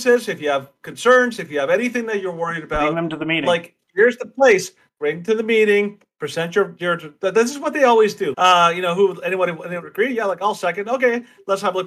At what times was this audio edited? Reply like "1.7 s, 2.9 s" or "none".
8.3 s